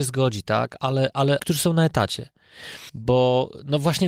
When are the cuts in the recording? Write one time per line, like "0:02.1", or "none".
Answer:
0:01.4
0:02.9